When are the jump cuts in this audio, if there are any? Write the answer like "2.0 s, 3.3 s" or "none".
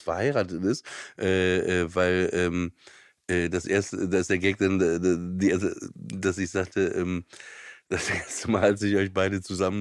none